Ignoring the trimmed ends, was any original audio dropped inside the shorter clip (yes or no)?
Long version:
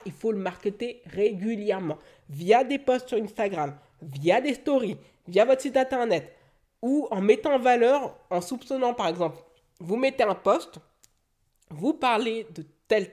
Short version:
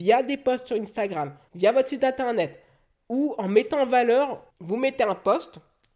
yes